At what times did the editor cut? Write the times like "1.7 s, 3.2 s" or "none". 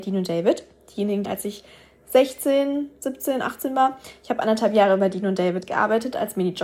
1.2 s